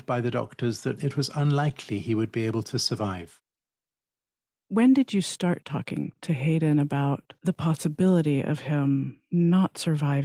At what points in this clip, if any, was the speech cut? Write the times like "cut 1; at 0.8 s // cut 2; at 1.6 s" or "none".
cut 1; at 1.0 s